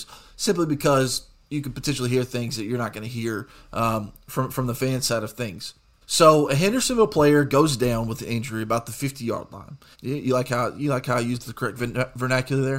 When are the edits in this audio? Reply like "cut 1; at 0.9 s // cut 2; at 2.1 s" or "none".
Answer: cut 1; at 6.0 s // cut 2; at 9.9 s